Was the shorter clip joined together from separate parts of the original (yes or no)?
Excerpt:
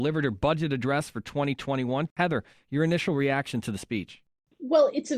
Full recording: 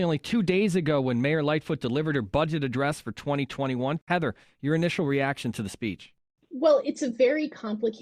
no